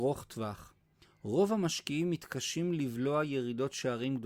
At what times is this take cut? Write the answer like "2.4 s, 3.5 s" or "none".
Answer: 1.0 s